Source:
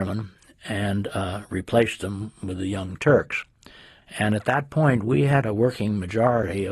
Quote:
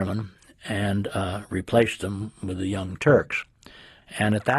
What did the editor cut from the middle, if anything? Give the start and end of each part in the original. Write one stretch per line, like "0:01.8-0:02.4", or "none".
none